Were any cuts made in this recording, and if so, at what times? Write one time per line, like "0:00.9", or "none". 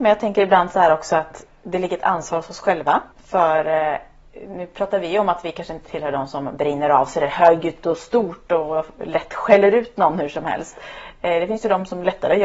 0:03.1